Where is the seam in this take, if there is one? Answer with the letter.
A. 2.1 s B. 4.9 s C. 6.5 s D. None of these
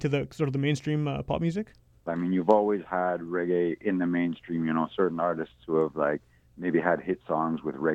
A